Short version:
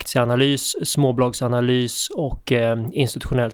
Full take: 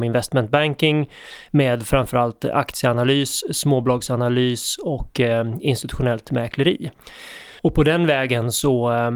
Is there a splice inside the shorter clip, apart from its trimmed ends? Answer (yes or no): no